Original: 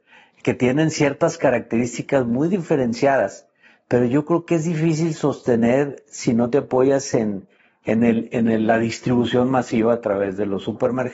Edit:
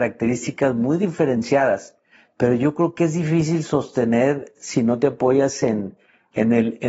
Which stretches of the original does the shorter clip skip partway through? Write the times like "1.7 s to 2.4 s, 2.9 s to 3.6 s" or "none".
none